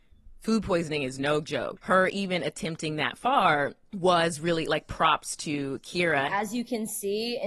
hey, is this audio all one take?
no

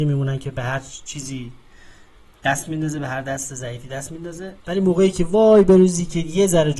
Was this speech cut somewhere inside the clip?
yes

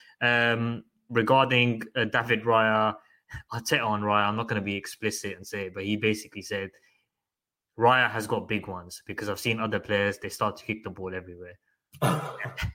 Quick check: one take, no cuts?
yes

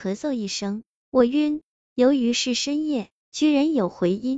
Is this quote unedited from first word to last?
yes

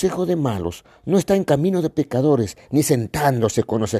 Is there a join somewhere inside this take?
no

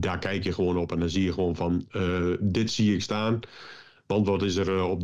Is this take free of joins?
yes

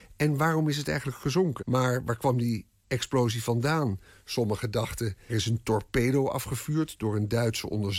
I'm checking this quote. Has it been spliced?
yes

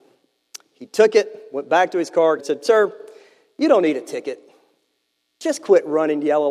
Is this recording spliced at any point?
yes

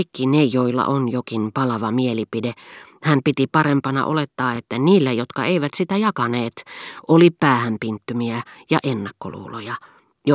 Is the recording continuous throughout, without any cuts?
yes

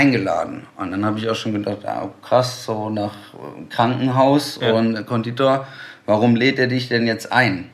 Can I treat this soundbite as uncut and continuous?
yes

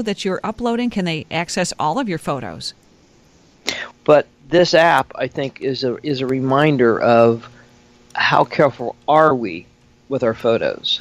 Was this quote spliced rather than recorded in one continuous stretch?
yes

